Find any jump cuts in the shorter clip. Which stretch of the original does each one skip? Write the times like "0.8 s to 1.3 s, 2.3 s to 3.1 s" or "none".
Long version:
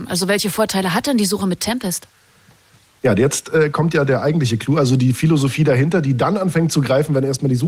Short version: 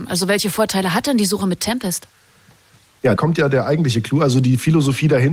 3.2 s to 3.7 s